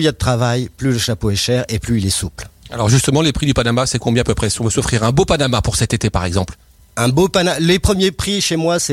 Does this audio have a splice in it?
no; 0 cuts

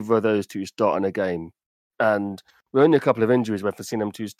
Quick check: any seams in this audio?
no; 0 cuts

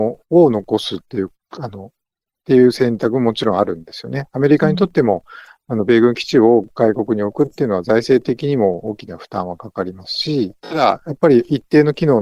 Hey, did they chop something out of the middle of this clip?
no; 0 cuts

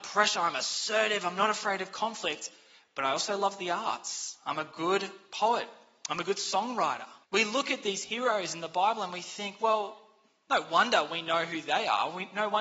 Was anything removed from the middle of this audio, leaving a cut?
yes; 1 cut; at 7.2 s

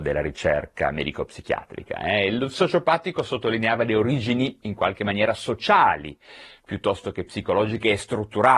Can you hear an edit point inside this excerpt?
no; 0 cuts

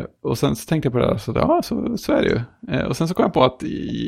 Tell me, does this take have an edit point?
no; 0 cuts

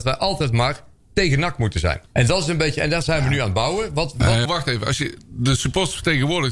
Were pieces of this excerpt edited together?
yes; 2 cuts; at 2.1 s, 4.4 s

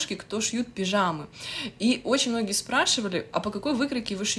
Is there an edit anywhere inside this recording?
no; 0 cuts

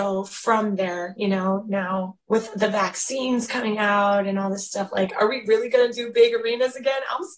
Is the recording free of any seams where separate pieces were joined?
no; 1 cut; at 2.2 s

